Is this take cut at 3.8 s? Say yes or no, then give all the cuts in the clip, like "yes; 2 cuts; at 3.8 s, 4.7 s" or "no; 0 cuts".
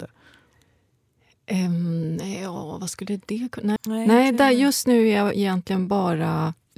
yes; 1 cut; at 3.8 s